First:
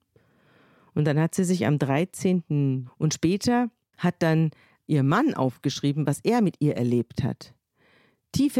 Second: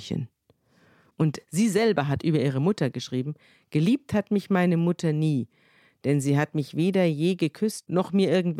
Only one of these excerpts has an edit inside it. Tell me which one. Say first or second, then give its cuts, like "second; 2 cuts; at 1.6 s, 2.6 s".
first; 1 cut; at 2.9 s